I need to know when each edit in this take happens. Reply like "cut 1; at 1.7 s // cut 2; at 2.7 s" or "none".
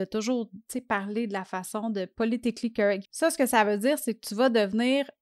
cut 1; at 3.0 s

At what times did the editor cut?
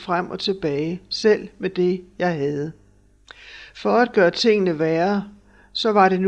none

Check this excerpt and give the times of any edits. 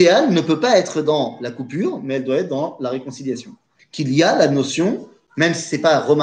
cut 1; at 3.8 s

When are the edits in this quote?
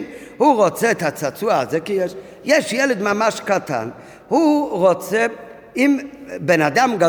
none

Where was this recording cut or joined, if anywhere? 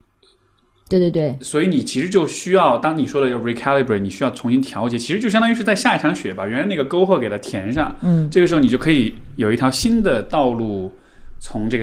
none

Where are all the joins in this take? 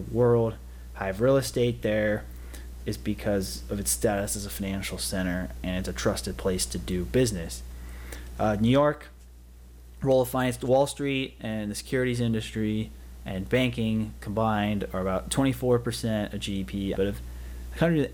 cut 1; at 16.9 s

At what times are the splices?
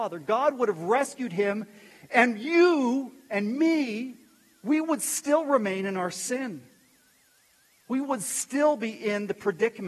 none

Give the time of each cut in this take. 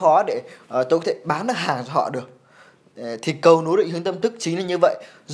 none

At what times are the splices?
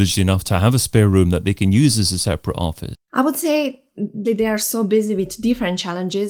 cut 1; at 2.9 s // cut 2; at 4.3 s

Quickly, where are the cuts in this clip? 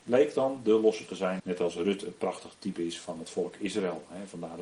cut 1; at 1.4 s

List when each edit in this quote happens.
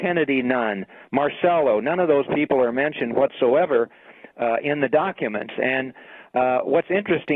none

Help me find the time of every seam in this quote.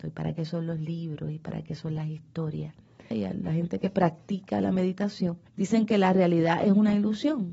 cut 1; at 3.1 s // cut 2; at 5.5 s

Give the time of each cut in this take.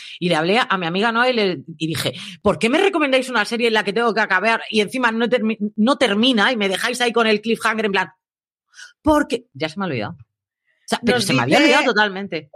none

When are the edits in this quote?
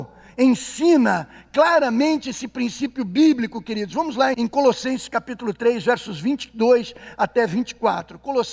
cut 1; at 4.3 s

